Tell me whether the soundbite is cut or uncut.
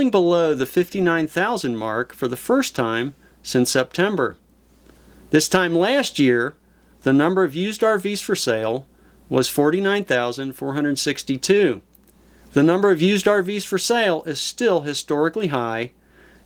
cut